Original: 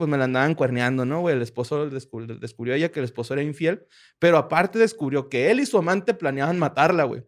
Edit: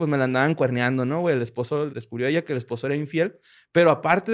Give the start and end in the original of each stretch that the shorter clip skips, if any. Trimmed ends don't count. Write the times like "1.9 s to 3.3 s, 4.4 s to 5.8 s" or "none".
1.9 s to 2.4 s